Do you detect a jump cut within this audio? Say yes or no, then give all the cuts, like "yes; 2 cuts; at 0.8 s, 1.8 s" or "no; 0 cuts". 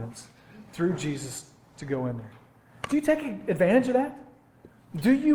no; 0 cuts